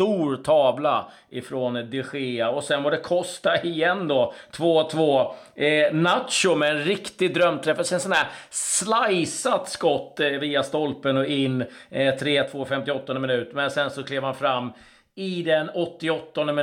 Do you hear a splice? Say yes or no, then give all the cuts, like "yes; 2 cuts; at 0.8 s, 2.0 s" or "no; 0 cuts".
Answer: no; 0 cuts